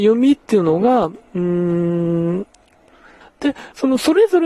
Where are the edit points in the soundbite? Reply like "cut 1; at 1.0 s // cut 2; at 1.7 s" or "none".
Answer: cut 1; at 3.2 s